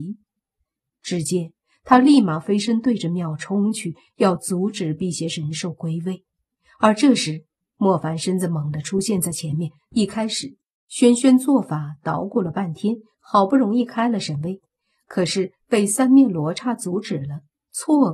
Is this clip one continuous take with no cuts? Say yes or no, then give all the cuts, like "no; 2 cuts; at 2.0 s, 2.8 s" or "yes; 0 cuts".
no; 1 cut; at 9.9 s